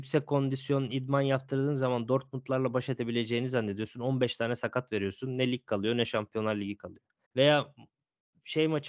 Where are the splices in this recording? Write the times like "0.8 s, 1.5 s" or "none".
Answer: 7.2 s

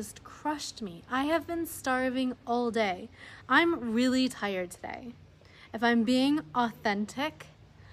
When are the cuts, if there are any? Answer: 3.4 s

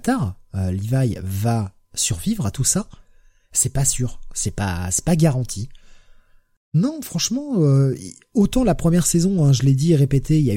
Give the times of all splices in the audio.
none

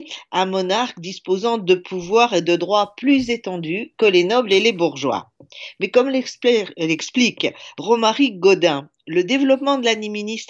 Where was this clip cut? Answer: none

